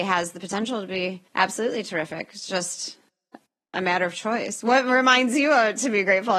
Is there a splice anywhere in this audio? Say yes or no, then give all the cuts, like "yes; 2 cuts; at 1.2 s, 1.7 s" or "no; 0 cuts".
yes; 1 cut; at 1.3 s